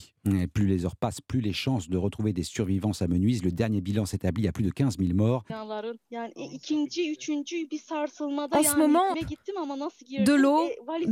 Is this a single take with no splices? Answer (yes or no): no